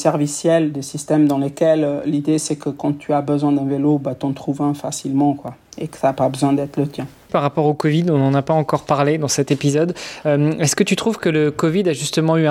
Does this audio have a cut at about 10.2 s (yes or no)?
no